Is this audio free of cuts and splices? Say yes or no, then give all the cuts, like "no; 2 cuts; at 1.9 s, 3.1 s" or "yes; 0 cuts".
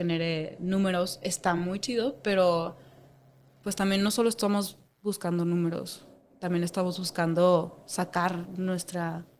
yes; 0 cuts